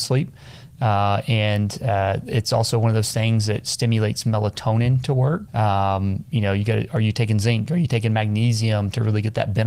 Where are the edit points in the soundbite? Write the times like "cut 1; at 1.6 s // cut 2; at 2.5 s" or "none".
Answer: cut 1; at 5.5 s